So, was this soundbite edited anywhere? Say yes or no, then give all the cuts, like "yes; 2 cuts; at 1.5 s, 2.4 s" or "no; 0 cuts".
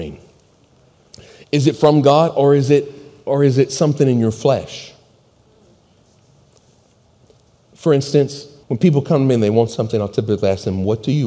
yes; 1 cut; at 8.6 s